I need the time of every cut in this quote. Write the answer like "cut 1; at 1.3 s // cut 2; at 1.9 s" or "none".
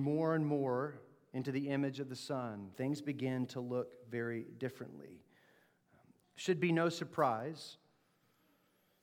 cut 1; at 2.7 s // cut 2; at 6.2 s